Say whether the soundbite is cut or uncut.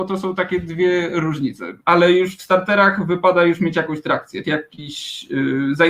cut